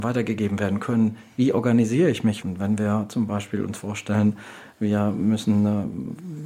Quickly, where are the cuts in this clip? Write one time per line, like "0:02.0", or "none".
0:02.4